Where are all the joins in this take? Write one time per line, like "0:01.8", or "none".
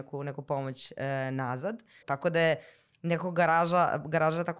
0:02.0